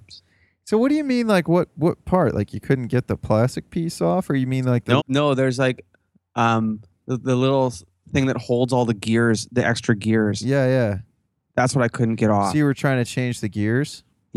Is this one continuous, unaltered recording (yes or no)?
no